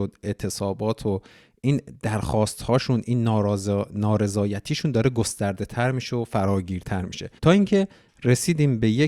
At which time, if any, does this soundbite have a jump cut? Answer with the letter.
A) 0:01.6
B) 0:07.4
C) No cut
B